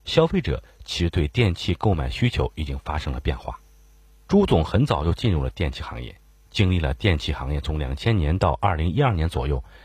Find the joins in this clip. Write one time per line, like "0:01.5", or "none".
none

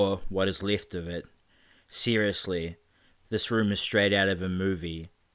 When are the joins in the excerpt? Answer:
none

